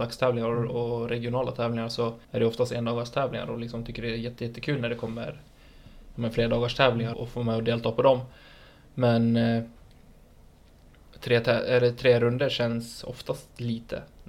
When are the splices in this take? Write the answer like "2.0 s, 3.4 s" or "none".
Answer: 2.2 s, 7.1 s